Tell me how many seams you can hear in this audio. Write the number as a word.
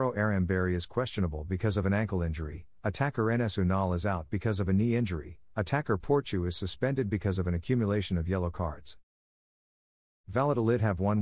zero